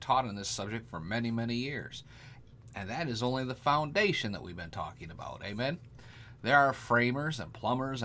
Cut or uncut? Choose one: uncut